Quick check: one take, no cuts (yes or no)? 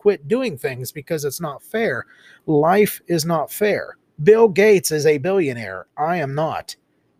yes